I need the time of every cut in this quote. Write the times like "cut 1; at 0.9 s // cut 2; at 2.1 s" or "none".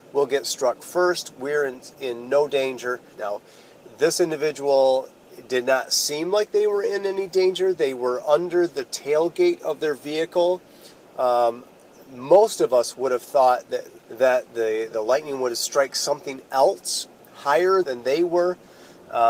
cut 1; at 3.1 s // cut 2; at 14.0 s // cut 3; at 17.8 s

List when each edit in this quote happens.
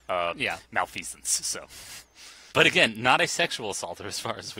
cut 1; at 2.5 s

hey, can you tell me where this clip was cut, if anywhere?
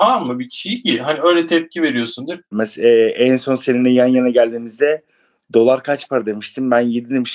cut 1; at 2.5 s

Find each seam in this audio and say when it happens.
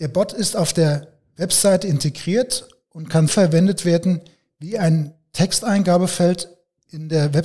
cut 1; at 3.3 s

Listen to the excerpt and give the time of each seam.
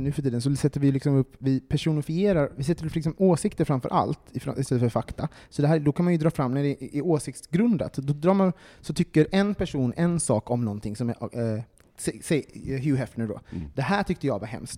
none

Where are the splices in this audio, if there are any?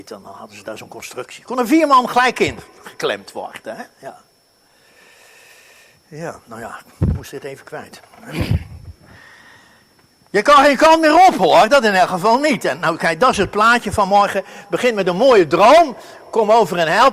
none

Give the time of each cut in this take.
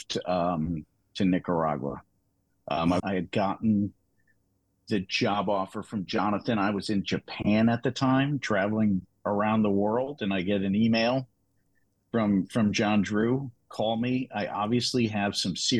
cut 1; at 3.0 s // cut 2; at 13.6 s

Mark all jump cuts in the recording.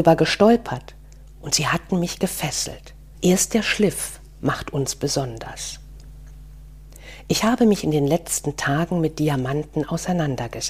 cut 1; at 3.1 s

